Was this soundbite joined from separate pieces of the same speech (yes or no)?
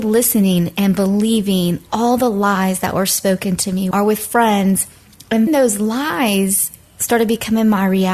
yes